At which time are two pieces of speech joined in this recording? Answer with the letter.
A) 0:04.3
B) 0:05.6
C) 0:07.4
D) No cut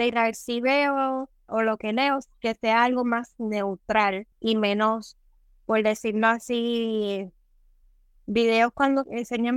A